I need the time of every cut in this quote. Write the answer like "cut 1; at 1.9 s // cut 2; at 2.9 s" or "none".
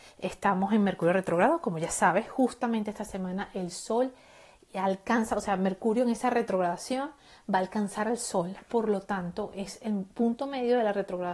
none